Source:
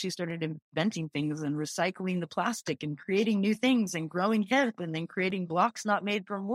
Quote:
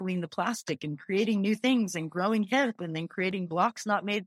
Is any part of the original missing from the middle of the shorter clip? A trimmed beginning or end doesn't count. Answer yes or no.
no